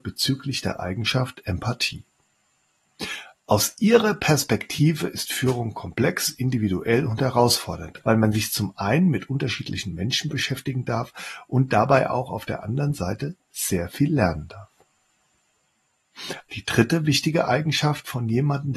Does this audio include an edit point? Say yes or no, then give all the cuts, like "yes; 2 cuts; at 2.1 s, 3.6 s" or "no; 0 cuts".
yes; 2 cuts; at 8.0 s, 16.5 s